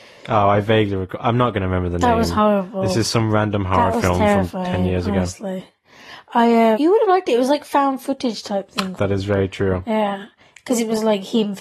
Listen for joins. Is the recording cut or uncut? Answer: cut